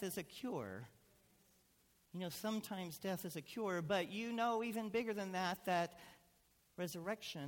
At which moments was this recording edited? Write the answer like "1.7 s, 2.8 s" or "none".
none